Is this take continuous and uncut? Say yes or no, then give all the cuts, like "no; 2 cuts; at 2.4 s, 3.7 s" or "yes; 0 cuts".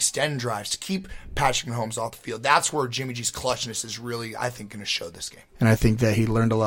yes; 0 cuts